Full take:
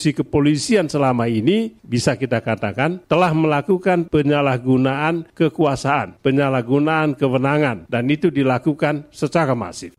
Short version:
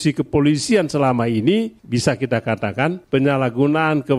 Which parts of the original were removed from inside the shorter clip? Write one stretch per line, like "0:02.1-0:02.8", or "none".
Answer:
0:03.1-0:06.2